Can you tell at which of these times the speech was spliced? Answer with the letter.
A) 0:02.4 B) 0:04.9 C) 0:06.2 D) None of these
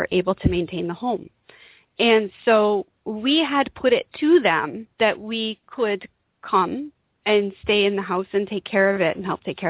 B